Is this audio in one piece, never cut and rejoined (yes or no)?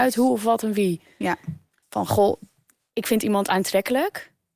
no